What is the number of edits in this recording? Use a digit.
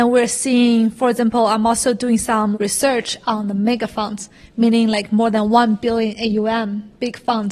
1